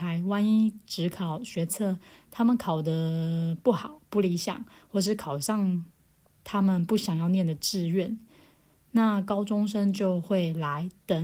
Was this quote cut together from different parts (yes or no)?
no